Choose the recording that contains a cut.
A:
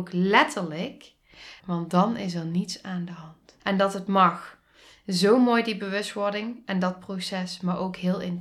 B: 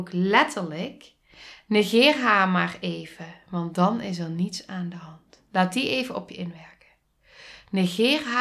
A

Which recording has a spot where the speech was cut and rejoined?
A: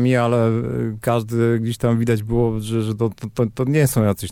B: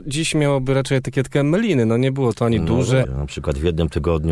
B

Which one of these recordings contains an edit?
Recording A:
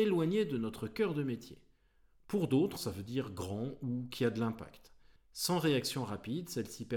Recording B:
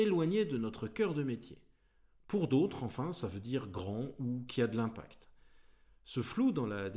A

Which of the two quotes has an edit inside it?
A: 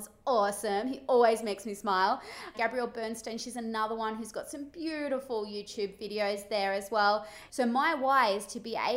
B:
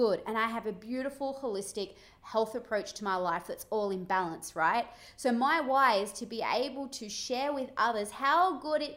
A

